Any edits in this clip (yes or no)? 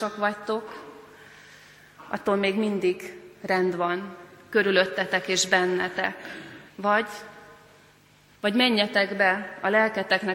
yes